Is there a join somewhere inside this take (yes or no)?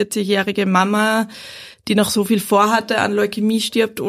no